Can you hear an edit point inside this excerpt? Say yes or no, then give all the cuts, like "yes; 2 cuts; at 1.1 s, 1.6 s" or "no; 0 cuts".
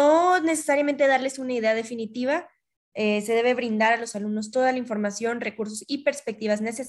yes; 1 cut; at 2.9 s